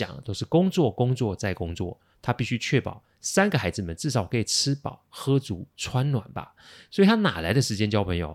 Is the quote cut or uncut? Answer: uncut